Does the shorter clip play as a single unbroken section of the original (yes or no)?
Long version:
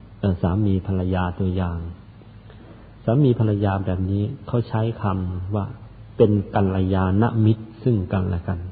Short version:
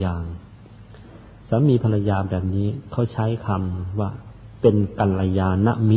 yes